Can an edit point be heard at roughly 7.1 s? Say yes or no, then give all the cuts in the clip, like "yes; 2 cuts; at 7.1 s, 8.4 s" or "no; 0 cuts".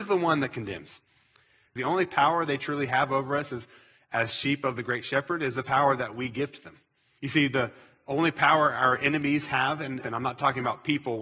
yes; 3 cuts; at 1.8 s, 7.1 s, 10.0 s